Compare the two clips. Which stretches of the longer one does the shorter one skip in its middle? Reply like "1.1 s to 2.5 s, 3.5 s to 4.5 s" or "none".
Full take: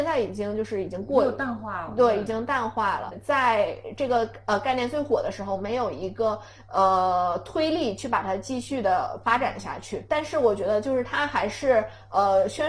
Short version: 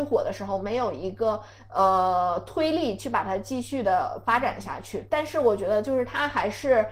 none